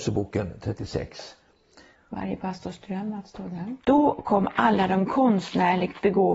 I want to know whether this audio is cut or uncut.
cut